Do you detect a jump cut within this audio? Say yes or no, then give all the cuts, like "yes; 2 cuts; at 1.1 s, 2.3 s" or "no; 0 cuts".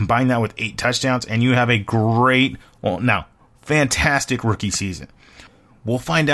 no; 0 cuts